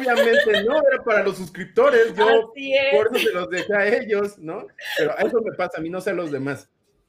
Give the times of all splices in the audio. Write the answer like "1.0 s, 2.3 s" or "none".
none